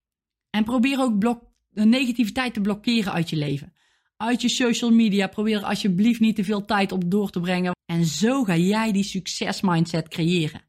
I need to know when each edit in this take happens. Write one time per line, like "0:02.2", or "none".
0:07.7